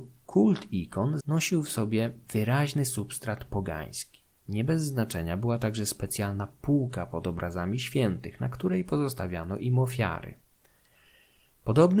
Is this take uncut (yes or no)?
no